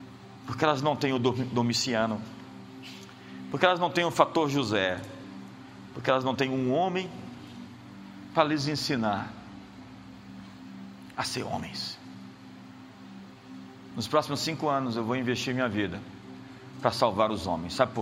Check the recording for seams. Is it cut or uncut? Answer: uncut